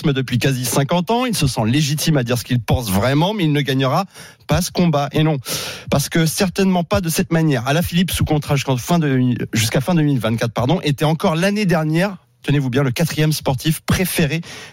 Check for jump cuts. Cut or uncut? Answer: uncut